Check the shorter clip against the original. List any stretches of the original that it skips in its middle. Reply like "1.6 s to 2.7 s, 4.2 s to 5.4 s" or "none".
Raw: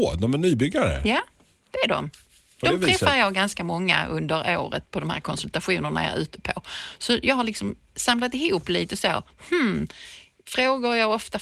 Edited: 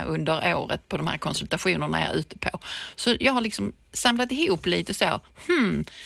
none